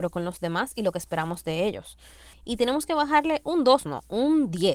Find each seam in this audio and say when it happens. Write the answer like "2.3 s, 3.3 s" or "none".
2.3 s